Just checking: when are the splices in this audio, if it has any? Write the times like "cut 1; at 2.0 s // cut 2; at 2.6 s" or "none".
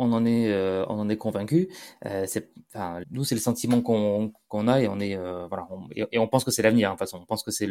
cut 1; at 3.0 s